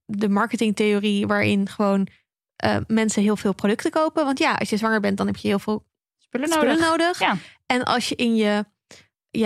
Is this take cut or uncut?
uncut